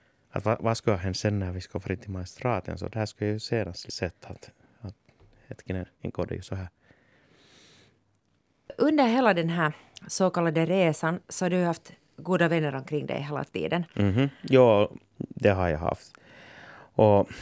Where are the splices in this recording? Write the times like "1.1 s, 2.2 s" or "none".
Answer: 2.9 s, 5.9 s